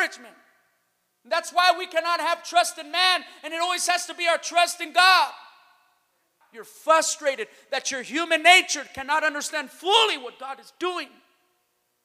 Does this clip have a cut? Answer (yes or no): yes